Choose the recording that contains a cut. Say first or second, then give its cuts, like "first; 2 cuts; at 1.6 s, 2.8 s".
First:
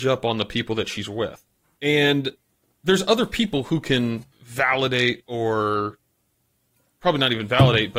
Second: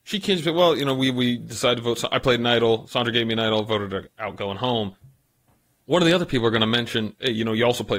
first; 2 cuts; at 1.8 s, 4.3 s